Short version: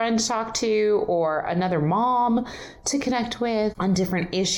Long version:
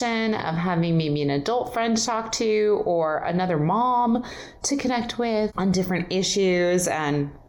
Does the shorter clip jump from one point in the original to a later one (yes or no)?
no